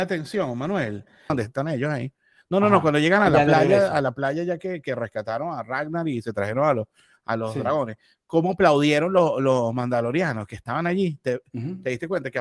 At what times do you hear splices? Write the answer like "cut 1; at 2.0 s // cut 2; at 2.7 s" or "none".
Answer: cut 1; at 1.3 s